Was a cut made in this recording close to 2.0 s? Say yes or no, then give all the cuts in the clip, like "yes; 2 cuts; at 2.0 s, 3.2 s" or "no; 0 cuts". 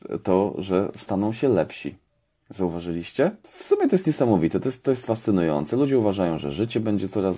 no; 0 cuts